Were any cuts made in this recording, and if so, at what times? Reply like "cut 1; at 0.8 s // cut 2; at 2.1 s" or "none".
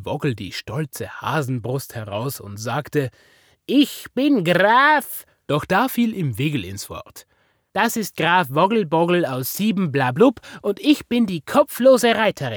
none